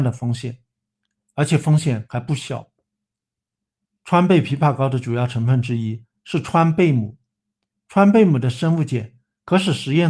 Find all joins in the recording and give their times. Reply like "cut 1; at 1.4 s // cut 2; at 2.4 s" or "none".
none